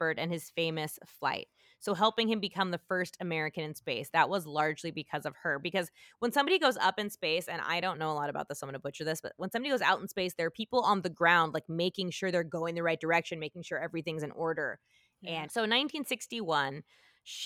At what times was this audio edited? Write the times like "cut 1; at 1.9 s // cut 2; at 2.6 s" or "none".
cut 1; at 15.4 s

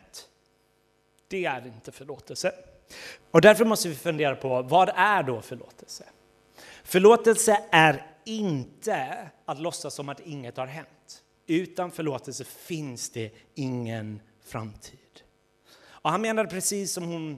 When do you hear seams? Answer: cut 1; at 3.2 s // cut 2; at 11.4 s

